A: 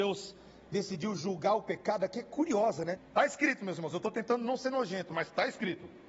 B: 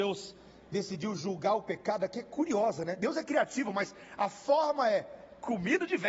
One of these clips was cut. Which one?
A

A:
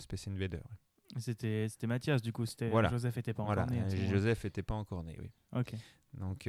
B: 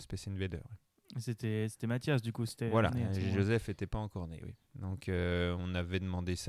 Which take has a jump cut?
B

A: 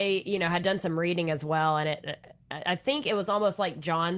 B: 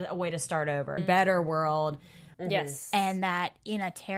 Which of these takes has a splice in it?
B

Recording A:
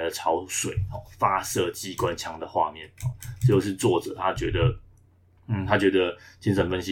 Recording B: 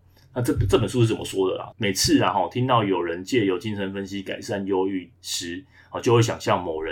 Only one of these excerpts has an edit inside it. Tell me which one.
B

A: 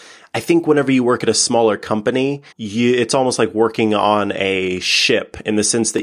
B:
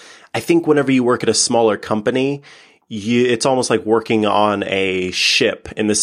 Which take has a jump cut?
A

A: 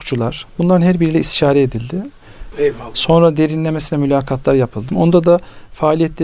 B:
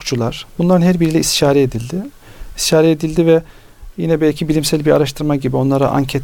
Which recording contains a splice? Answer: A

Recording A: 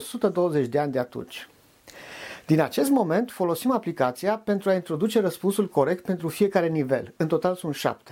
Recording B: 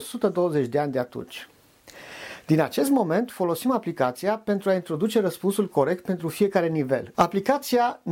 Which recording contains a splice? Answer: B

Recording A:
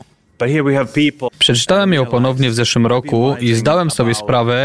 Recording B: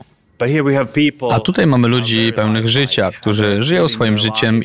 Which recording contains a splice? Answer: A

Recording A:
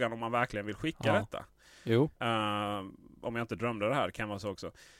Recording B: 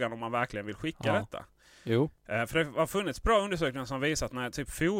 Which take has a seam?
A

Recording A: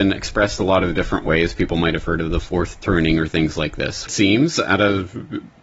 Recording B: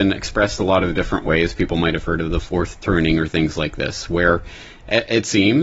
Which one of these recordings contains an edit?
A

